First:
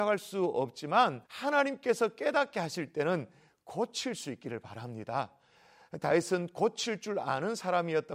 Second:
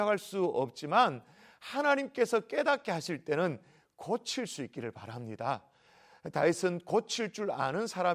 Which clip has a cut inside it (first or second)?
first